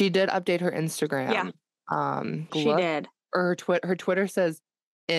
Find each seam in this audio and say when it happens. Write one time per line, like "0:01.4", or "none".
0:02.5